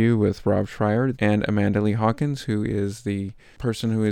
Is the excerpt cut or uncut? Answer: cut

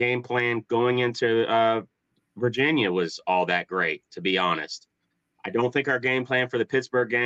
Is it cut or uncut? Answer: cut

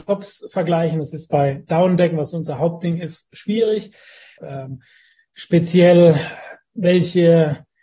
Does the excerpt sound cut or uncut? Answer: cut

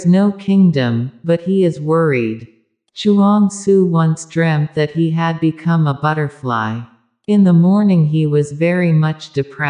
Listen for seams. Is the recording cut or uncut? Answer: uncut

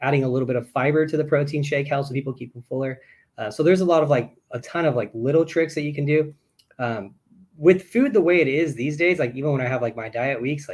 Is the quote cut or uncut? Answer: uncut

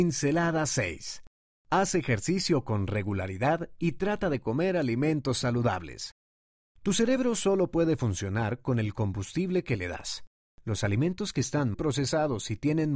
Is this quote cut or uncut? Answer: cut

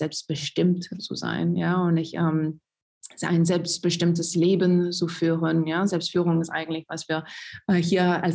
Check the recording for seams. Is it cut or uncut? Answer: uncut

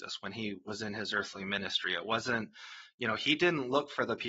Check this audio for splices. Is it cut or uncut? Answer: uncut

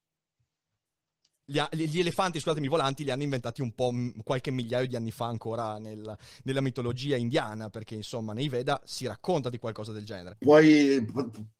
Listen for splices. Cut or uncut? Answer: cut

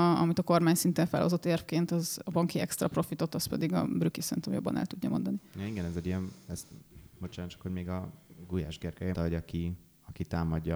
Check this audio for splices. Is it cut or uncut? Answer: cut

